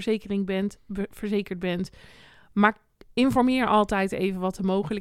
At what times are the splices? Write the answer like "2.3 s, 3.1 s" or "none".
none